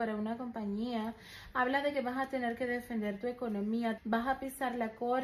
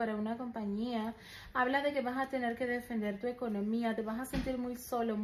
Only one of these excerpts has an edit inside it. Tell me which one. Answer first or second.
first